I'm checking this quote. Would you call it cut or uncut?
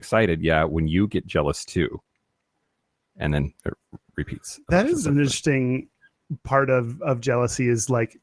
cut